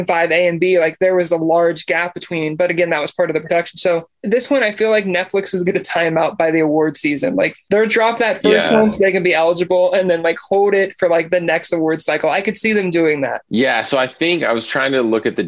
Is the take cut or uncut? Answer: uncut